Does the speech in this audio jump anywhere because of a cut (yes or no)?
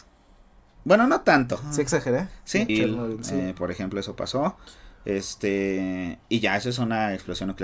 yes